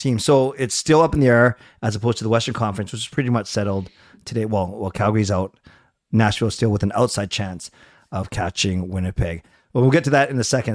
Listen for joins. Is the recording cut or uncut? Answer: uncut